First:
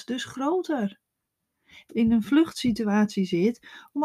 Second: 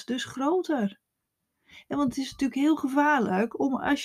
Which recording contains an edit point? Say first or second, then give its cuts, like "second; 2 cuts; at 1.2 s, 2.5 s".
first; 1 cut; at 1.9 s